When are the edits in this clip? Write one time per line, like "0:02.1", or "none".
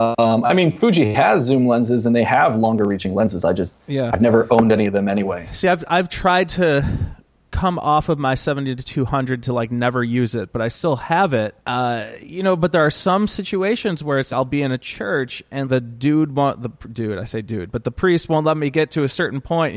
0:11.6
0:14.3
0:15.6